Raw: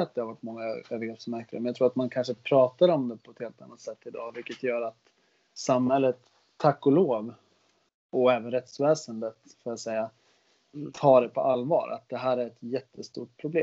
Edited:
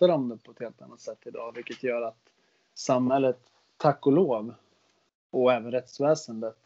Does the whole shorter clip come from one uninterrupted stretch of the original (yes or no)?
yes